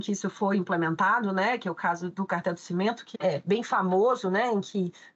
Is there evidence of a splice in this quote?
yes; 1 cut; at 3.1 s

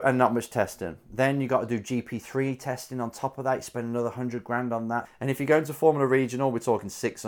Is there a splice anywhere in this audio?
yes; 1 cut; at 5.0 s

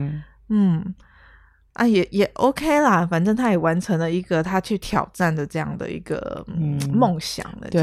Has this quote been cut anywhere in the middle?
no; 0 cuts

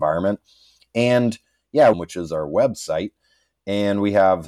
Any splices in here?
yes; 1 cut; at 1.9 s

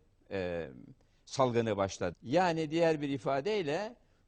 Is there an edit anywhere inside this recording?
yes; 1 cut; at 2.1 s

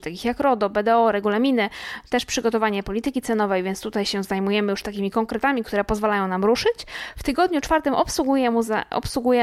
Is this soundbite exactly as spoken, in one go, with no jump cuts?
yes; 0 cuts

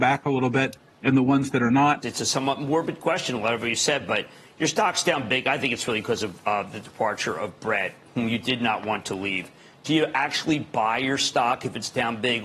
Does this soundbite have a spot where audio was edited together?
yes; 1 cut; at 2.0 s

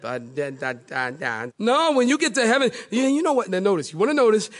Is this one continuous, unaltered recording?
no; 2 cuts; at 1.5 s, 3.5 s

